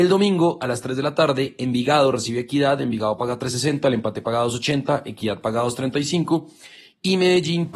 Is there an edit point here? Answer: no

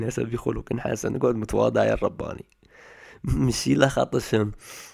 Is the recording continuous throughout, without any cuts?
yes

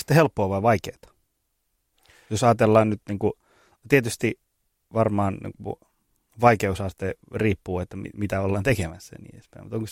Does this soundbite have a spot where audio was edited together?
no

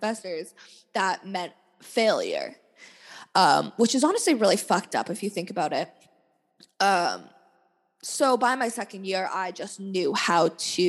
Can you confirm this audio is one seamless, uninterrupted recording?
yes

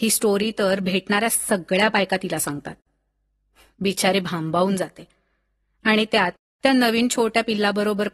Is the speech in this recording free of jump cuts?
yes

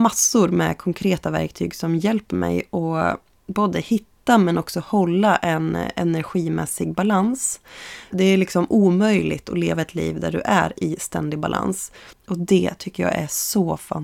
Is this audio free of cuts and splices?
no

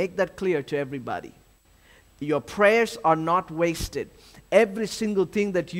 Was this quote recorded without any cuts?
yes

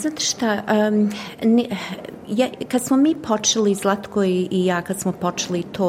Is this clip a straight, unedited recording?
yes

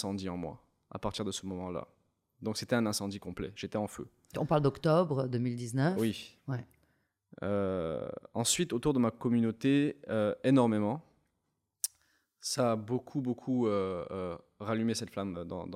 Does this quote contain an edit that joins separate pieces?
no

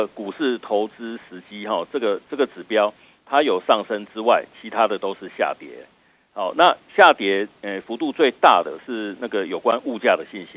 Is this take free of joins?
yes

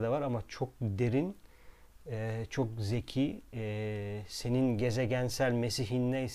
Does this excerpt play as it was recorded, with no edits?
yes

